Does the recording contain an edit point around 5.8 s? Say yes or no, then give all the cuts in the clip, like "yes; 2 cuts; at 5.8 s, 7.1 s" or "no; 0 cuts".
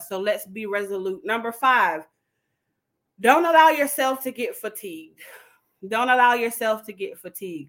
no; 0 cuts